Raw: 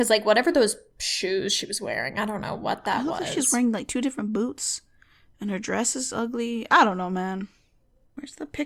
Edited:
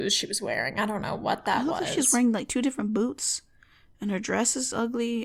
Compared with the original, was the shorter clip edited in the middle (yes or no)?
no